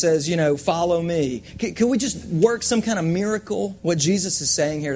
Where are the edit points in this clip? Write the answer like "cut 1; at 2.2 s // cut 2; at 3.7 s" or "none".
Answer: cut 1; at 3.8 s